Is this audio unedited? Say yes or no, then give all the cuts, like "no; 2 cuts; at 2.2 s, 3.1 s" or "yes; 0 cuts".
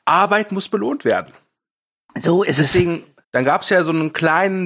no; 1 cut; at 3.2 s